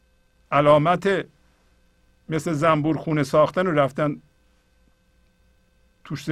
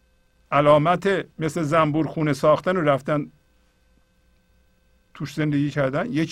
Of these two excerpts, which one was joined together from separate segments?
second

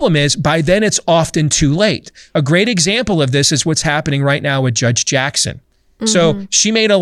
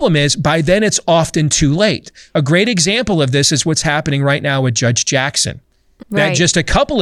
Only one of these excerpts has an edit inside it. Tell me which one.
second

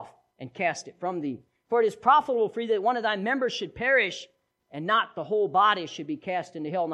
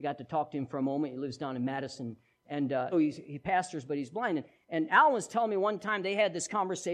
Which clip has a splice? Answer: second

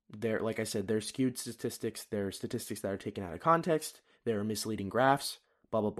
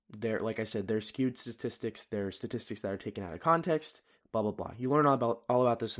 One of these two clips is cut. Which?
second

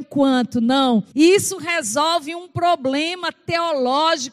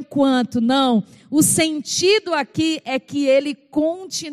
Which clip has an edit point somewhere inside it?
first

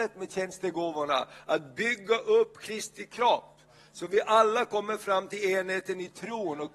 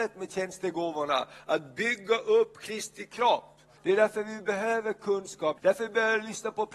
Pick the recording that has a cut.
second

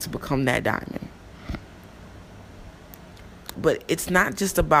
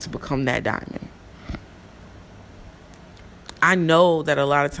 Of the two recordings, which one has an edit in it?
first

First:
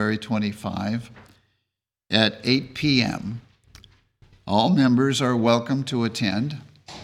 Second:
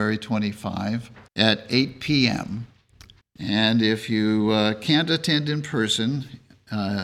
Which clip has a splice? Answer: second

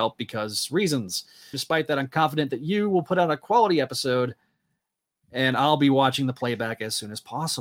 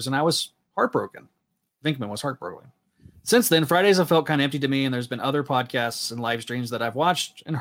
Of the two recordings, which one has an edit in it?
first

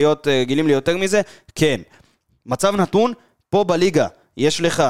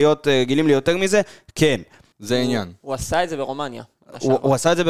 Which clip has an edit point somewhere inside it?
second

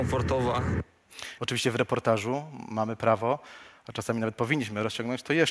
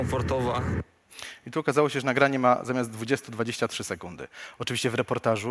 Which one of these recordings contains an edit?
first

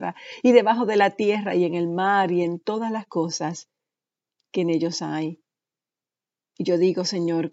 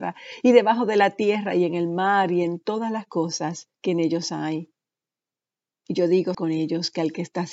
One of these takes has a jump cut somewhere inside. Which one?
second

